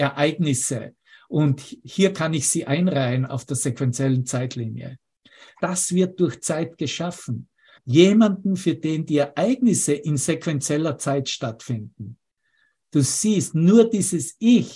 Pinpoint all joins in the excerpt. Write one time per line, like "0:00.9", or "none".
0:05.5
0:07.8